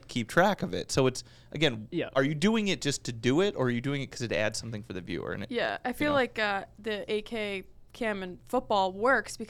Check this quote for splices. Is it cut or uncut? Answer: uncut